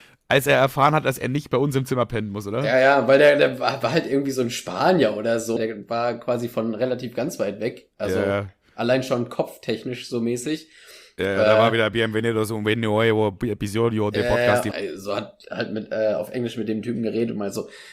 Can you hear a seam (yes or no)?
yes